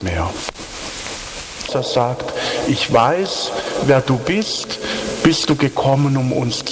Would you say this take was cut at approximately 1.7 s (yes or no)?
yes